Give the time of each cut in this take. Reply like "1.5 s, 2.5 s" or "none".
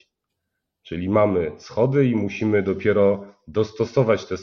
none